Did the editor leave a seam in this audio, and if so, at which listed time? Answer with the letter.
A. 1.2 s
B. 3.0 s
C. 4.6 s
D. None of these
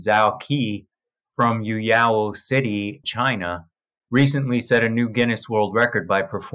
B